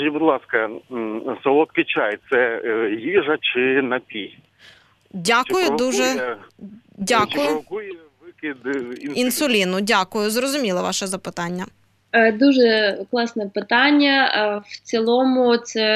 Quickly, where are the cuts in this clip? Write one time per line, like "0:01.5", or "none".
none